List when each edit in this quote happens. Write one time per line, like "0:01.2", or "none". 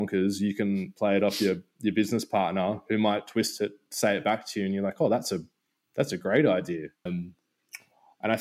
0:07.1